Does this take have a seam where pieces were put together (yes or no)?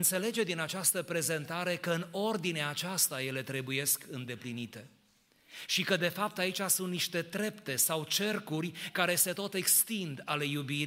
no